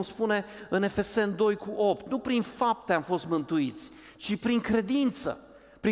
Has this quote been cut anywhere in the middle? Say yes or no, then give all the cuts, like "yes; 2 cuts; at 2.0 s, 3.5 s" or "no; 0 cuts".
no; 0 cuts